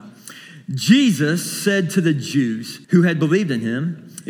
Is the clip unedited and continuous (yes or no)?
no